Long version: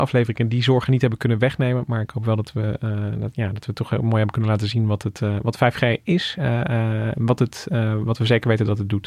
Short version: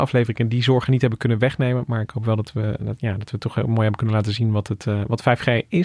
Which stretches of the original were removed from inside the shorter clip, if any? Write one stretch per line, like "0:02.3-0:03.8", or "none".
0:02.8-0:03.1